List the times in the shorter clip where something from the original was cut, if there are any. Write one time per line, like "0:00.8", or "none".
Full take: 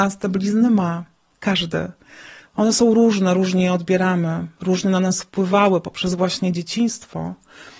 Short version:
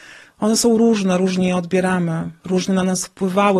none